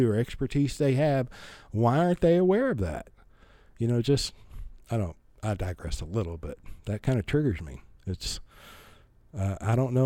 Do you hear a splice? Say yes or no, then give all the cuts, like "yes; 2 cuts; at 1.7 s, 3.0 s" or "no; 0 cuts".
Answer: yes; 1 cut; at 8.0 s